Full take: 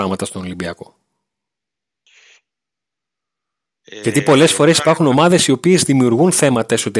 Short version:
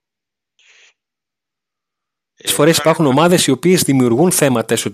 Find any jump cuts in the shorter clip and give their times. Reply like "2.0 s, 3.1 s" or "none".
2.5 s

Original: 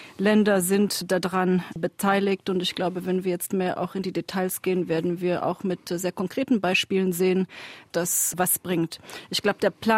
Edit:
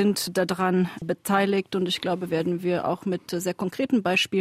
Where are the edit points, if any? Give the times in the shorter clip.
2.3 s

